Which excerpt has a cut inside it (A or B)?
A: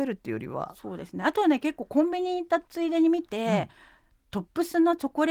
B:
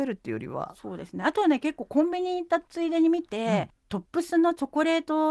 B